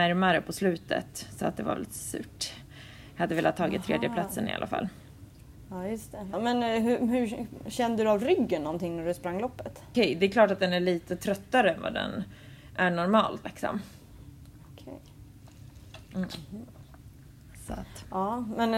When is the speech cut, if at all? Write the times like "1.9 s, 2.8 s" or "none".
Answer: 6.3 s, 9.9 s, 13.4 s